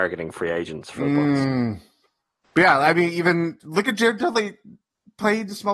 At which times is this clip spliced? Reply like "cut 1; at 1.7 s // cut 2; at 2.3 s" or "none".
cut 1; at 2.4 s

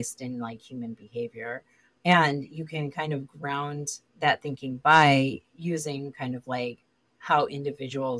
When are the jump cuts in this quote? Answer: cut 1; at 4.1 s

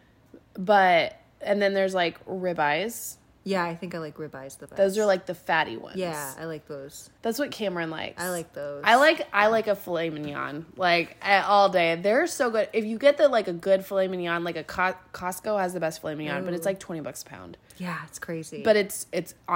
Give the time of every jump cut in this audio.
cut 1; at 7.2 s

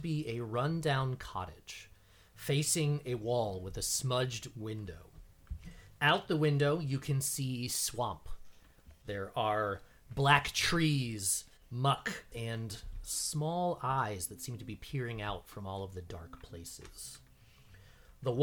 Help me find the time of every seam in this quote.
cut 1; at 12.3 s

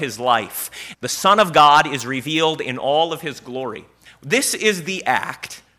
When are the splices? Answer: cut 1; at 0.9 s // cut 2; at 4.1 s

